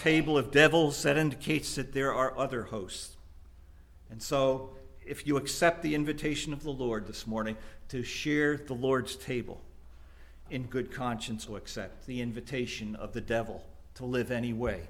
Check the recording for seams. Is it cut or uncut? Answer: cut